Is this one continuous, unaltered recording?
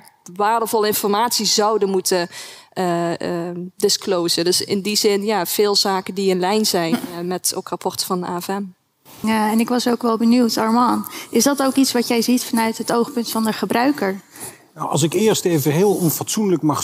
no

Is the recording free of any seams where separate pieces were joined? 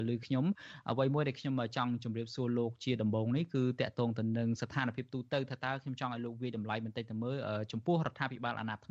yes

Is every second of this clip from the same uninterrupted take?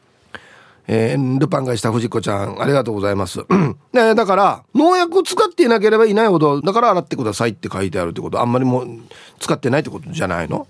no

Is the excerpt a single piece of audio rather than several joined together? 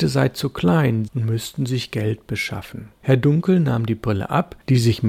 no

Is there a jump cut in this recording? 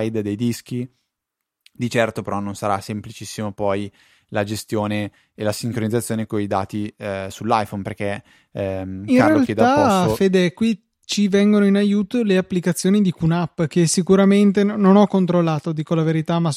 no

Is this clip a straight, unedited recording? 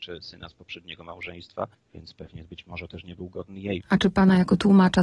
no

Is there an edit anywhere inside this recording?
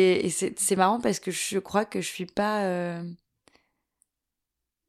no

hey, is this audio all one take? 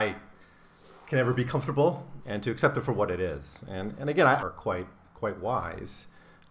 no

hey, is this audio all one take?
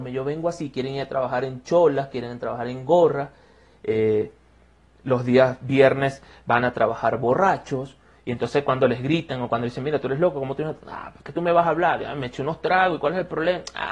yes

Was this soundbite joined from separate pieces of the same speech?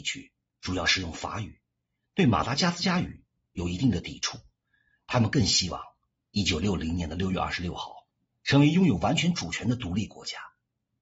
yes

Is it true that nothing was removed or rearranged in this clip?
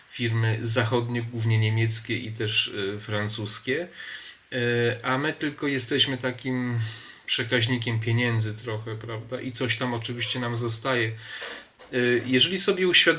yes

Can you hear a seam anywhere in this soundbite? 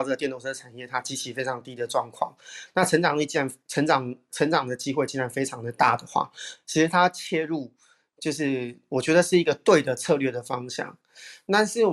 no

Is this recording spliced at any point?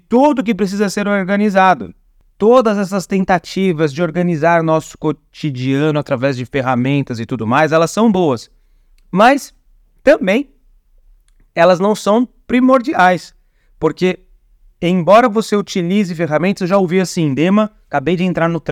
no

